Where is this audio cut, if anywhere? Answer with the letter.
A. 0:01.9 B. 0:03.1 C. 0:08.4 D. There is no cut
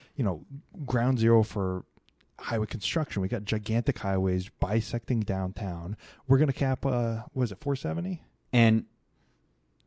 C